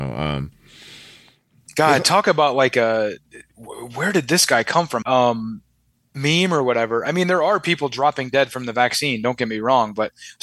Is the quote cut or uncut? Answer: cut